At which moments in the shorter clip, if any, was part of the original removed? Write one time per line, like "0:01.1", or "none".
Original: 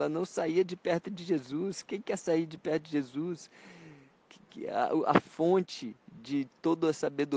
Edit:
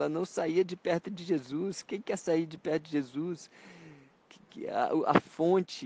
none